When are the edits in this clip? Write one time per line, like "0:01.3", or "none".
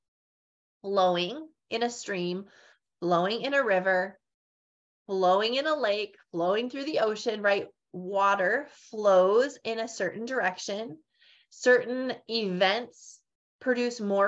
none